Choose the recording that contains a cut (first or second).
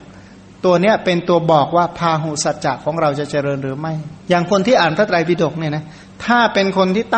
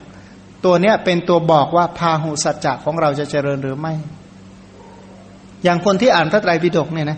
first